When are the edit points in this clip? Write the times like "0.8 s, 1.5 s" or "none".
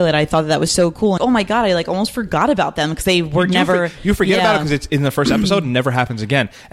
1.2 s